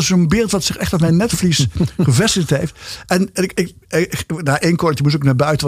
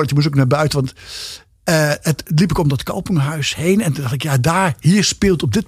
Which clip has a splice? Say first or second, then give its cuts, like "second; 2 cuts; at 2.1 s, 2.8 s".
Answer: first; 1 cut; at 3.8 s